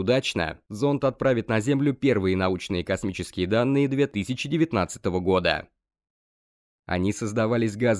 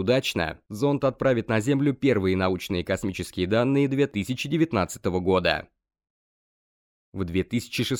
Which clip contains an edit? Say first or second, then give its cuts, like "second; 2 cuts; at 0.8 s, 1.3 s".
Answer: first; 1 cut; at 6.8 s